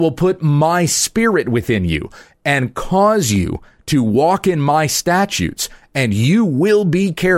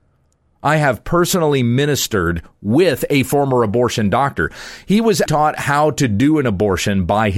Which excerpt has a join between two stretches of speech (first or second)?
second